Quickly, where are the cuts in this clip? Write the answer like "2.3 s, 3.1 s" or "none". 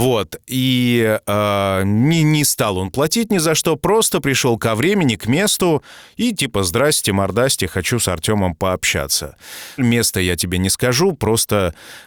9.8 s